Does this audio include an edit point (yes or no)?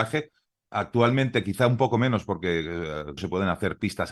yes